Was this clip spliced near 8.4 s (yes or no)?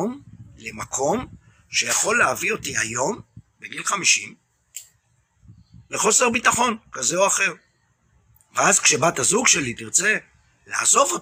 yes